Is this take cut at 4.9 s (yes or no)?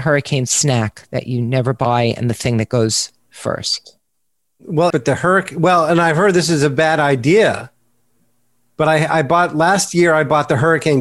yes